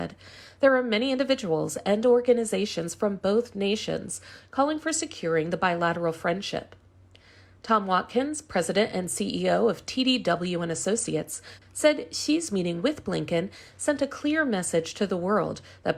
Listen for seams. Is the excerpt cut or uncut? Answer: cut